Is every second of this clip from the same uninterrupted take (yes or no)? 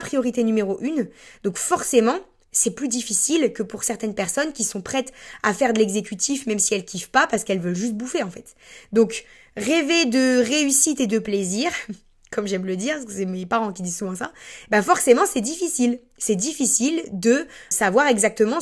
yes